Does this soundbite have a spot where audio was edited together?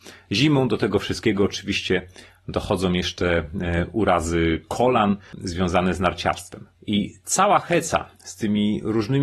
yes; 1 cut; at 6.8 s

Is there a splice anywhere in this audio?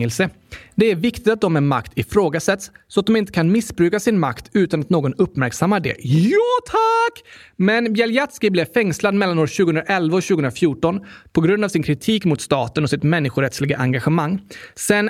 no; 0 cuts

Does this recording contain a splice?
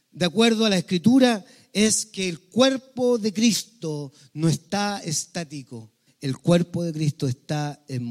yes; 1 cut; at 6.1 s

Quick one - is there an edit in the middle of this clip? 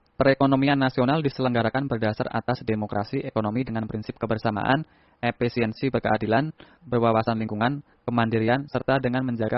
yes; 1 cut; at 6.8 s

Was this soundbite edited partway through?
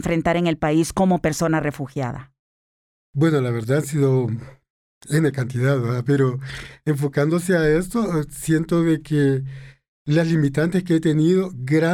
no; 0 cuts

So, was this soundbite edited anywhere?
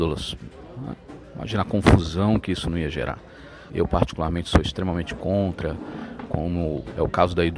yes; 1 cut; at 3.7 s

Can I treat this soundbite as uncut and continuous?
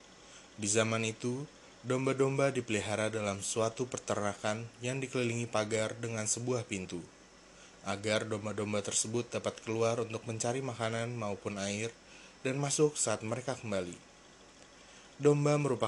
yes; 0 cuts

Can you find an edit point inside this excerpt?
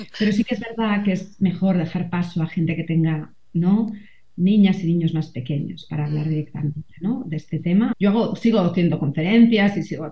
yes; 1 cut; at 7.9 s

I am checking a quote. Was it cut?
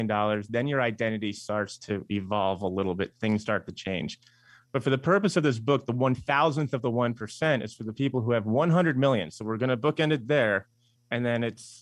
no; 0 cuts

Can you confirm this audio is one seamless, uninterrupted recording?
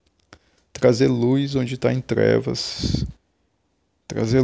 yes; 0 cuts

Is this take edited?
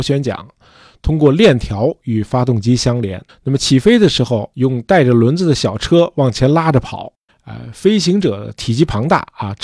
yes; 3 cuts; at 3.3 s, 4.5 s, 7.3 s

